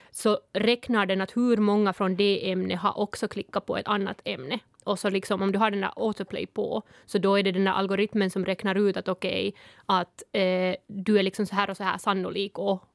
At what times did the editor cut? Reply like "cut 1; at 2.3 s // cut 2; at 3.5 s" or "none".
none